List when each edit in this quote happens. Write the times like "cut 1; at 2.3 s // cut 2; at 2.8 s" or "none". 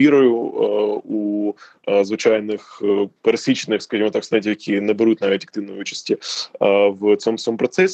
cut 1; at 3.2 s